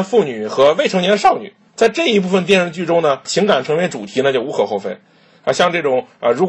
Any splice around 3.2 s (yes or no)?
yes